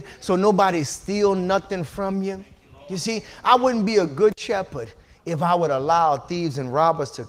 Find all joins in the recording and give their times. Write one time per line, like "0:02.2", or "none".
none